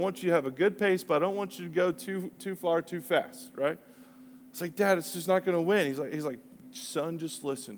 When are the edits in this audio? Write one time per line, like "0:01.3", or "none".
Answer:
none